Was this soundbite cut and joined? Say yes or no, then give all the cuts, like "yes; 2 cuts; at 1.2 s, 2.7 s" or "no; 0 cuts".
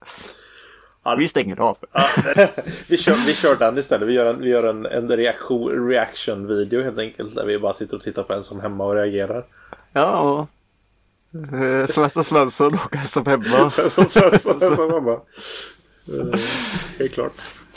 yes; 2 cuts; at 2.3 s, 9.8 s